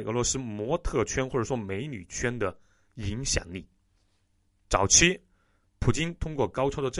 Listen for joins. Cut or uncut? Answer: cut